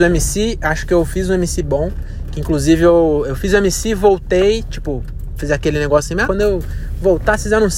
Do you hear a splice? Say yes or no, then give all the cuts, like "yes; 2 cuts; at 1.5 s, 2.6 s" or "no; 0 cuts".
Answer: yes; 1 cut; at 6.3 s